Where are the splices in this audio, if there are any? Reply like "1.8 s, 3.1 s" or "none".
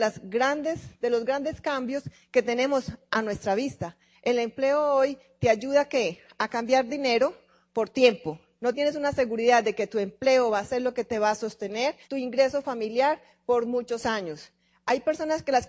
8.6 s, 12.0 s